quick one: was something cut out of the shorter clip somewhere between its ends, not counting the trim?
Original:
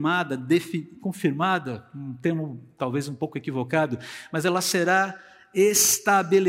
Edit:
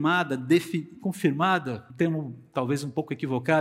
yes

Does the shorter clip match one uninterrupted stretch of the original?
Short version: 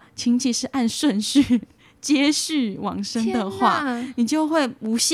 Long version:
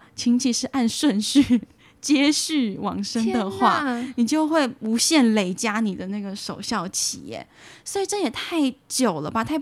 yes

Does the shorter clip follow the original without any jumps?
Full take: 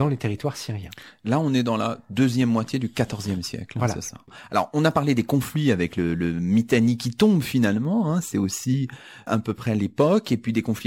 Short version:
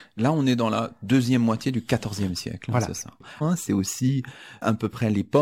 no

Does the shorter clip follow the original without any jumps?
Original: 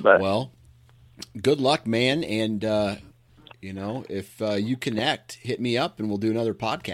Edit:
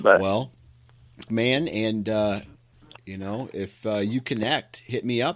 no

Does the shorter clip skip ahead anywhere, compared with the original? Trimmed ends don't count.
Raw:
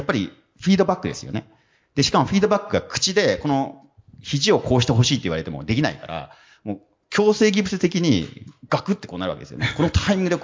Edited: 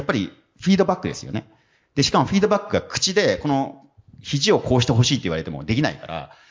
no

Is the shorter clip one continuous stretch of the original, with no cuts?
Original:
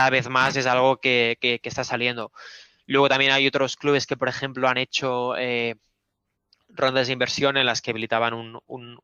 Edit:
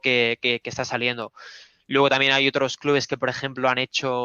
yes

